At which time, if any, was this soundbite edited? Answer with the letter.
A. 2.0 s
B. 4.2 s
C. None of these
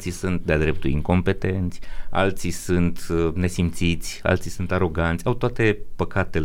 C